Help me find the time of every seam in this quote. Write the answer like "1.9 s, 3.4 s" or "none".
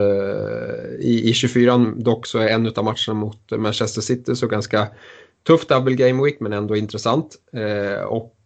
7.4 s